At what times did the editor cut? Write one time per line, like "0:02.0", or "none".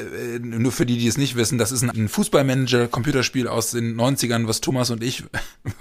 0:01.9